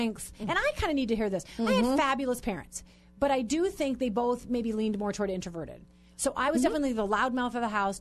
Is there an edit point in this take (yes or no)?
no